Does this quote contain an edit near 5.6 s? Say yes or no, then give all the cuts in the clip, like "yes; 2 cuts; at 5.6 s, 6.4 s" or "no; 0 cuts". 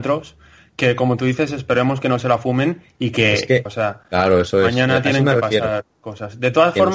no; 1 cut; at 3.7 s